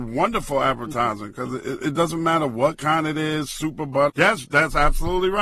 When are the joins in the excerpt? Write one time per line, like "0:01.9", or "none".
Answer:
0:04.1